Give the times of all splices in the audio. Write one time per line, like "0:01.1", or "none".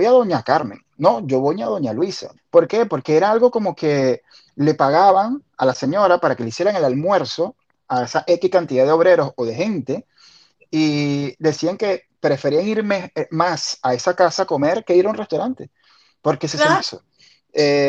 0:02.4
0:16.8